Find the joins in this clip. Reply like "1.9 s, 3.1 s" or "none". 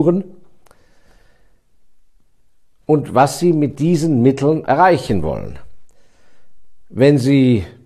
4.7 s